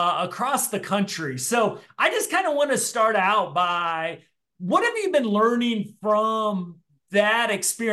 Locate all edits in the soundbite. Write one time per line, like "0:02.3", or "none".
none